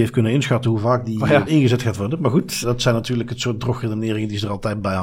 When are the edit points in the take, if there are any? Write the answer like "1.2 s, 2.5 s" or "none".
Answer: 1.5 s, 2.6 s